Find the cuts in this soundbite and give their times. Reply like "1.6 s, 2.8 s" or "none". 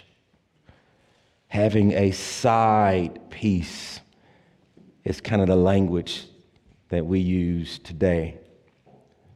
none